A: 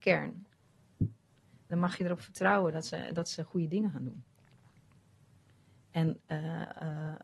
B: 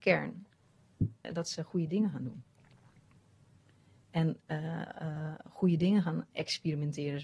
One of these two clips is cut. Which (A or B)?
B